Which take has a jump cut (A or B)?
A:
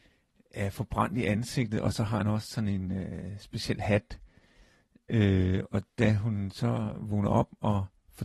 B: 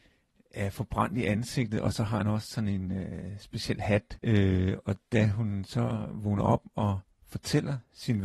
B